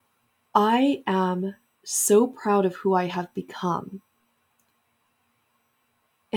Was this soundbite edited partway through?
no; 0 cuts

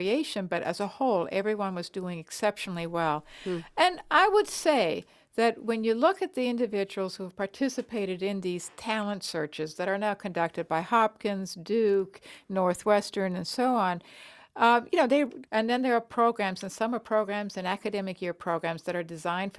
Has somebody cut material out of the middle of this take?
yes; 1 cut; at 15.5 s

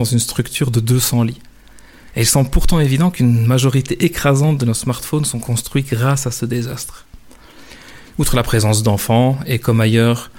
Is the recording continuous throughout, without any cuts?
no; 1 cut; at 8.1 s

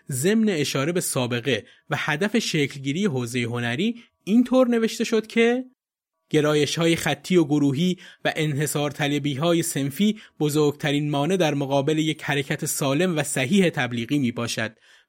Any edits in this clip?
no; 0 cuts

